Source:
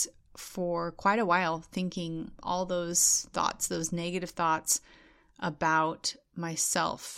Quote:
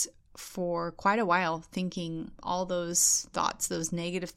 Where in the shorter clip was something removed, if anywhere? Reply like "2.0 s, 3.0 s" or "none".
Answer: none